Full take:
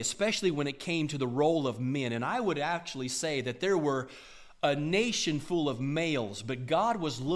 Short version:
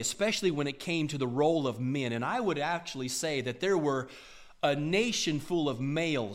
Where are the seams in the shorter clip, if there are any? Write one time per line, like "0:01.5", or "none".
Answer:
none